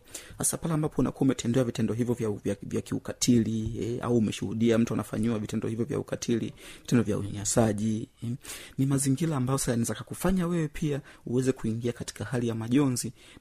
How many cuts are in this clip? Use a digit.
0